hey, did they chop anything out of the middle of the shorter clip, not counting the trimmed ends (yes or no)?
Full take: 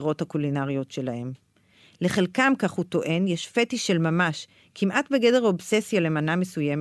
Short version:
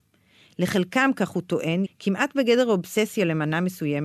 yes